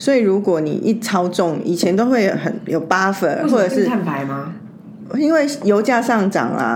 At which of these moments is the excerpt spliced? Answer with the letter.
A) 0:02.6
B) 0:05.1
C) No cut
C